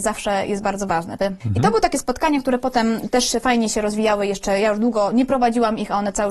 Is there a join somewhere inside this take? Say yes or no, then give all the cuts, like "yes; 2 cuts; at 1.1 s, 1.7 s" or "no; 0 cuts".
yes; 1 cut; at 1.2 s